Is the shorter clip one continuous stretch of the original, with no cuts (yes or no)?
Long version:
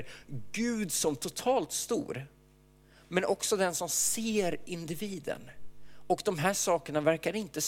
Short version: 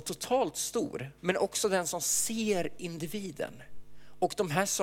no